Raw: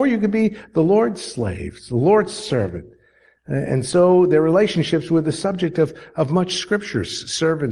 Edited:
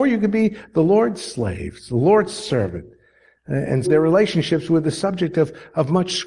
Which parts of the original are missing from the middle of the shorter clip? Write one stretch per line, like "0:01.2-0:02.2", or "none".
0:03.9-0:04.3